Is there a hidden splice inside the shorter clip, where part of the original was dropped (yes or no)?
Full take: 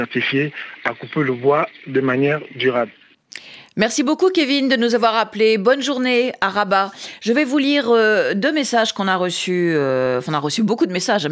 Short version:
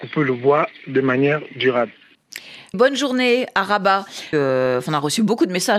yes